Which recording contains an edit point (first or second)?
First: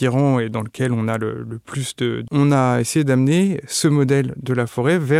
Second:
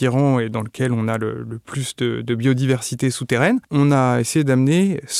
first